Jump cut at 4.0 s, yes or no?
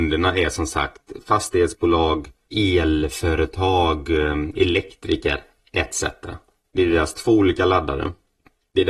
no